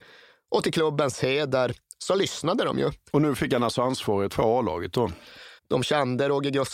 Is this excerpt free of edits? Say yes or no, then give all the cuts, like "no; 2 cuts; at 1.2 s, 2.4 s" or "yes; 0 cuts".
no; 3 cuts; at 3.1 s, 4.3 s, 5.6 s